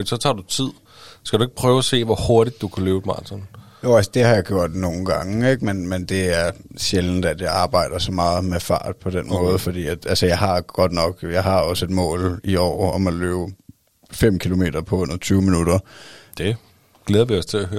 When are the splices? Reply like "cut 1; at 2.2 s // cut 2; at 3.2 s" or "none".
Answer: cut 1; at 16.3 s